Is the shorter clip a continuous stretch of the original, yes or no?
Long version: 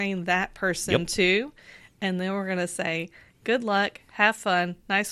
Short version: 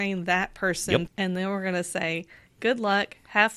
no